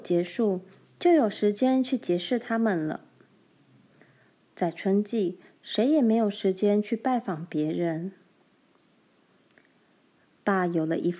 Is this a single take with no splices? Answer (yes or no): yes